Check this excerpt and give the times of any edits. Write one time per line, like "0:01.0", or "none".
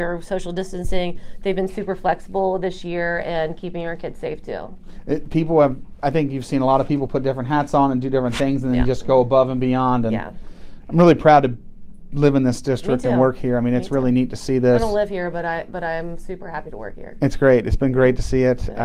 none

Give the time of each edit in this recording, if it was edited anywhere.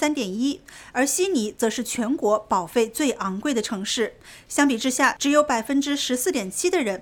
0:05.2

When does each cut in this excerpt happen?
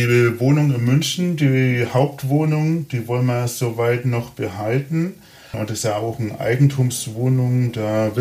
0:05.5

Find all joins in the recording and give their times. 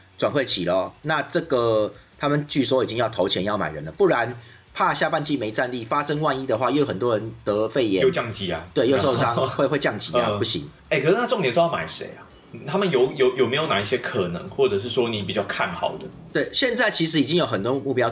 0:10.8

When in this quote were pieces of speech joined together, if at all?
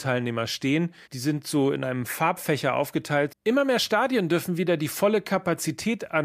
0:01.0
0:03.3

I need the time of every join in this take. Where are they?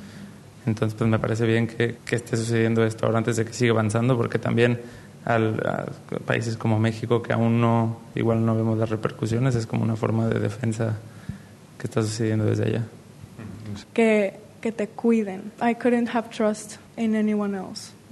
0:02.0
0:13.8
0:15.6

